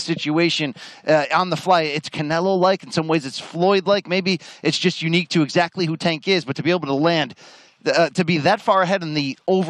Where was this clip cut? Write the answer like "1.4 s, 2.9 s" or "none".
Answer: none